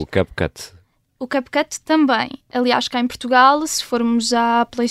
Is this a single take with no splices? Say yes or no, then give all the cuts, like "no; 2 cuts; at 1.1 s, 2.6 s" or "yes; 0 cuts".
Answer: yes; 0 cuts